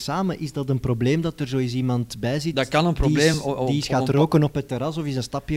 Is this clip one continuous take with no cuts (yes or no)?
yes